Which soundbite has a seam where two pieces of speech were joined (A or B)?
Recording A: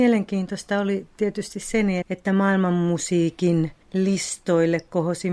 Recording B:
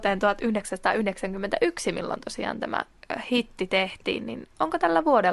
A